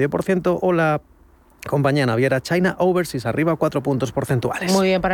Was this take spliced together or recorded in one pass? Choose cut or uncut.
uncut